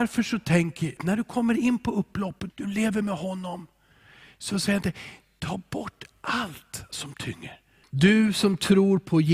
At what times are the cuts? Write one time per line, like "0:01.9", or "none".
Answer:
0:01.0
0:02.5
0:07.8